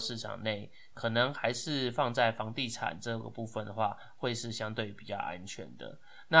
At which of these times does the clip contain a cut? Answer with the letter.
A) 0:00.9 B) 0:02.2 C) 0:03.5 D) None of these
D